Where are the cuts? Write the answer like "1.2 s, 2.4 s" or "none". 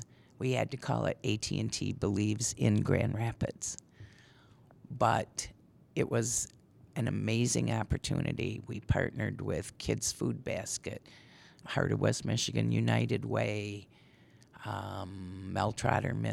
11.6 s

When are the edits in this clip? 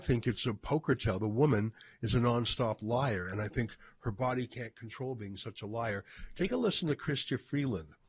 none

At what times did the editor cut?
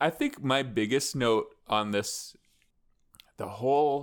none

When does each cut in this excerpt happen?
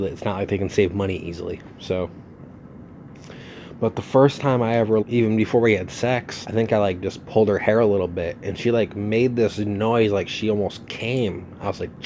5.0 s, 6.4 s

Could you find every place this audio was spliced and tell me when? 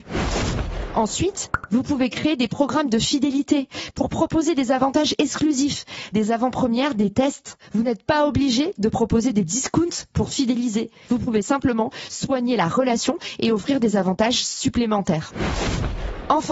6.1 s

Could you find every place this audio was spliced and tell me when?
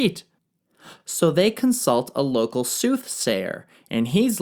none

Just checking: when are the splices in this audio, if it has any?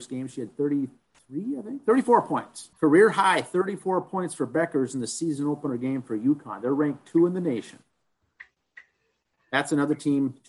2.7 s

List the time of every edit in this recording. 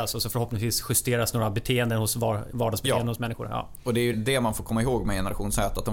4.1 s

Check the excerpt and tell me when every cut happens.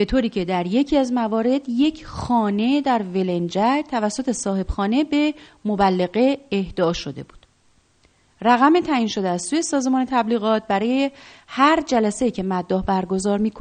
none

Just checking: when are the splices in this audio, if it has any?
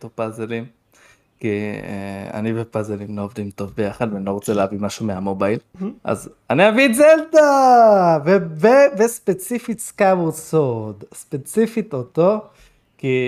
6.0 s

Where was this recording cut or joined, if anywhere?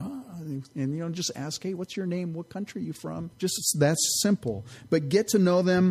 3.3 s

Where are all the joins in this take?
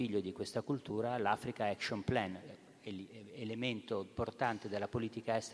none

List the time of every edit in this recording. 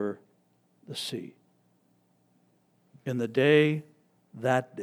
none

